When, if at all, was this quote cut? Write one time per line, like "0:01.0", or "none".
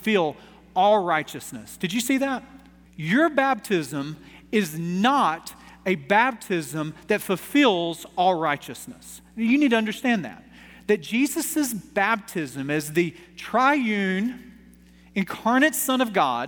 0:02.9